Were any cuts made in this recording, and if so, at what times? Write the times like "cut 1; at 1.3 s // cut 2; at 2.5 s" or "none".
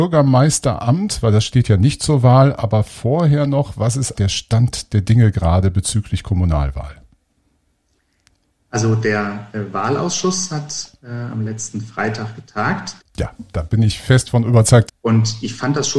cut 1; at 4.1 s // cut 2; at 13.0 s // cut 3; at 14.9 s